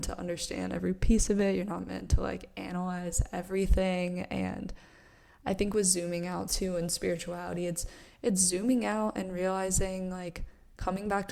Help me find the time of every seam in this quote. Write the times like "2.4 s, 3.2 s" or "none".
none